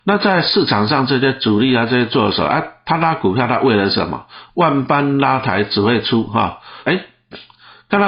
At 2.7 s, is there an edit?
no; 2 cuts; at 4.5 s, 6.9 s

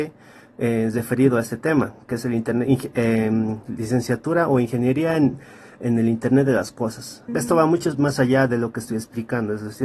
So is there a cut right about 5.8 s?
no; 1 cut; at 7.3 s

